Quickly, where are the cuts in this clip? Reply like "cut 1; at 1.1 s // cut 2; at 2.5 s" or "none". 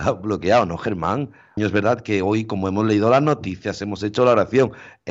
cut 1; at 1.6 s